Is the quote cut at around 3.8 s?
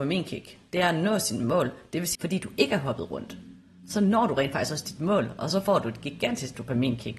no; 1 cut; at 2.1 s

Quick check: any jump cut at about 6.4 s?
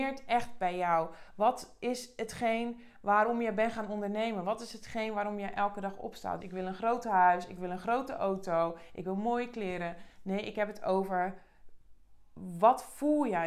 yes; 1 cut; at 6.4 s

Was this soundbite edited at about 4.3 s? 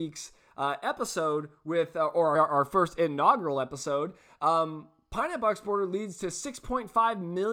no; 1 cut; at 2.4 s

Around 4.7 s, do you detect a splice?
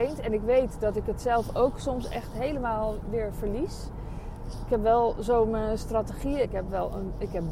no; 1 cut; at 6.4 s

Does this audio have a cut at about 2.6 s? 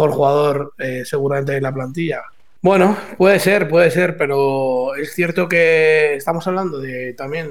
yes; 1 cut; at 2.6 s

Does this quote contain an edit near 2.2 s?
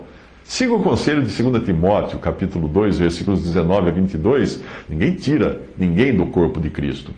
no; 1 cut; at 4.9 s

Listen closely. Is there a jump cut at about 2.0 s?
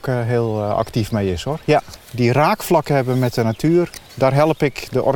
yes; 1 cut; at 2.0 s

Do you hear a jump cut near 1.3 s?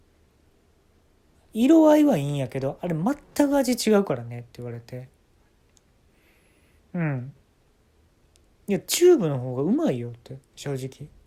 yes; 1 cut; at 1.3 s

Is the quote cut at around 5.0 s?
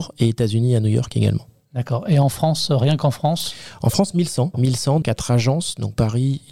yes; 1 cut; at 5.0 s

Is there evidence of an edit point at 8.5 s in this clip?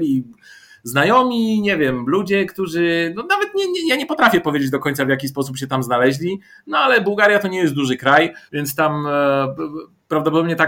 yes; 1 cut; at 8.5 s

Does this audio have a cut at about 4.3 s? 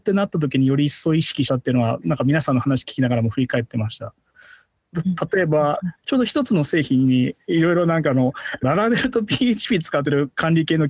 no; 2 cuts; at 6.0 s, 8.6 s

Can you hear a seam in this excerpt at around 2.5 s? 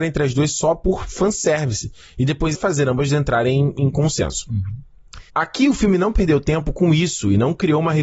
yes; 2 cuts; at 2.5 s, 5.3 s

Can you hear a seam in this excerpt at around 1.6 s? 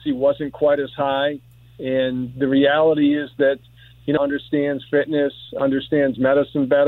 no; 1 cut; at 4.2 s

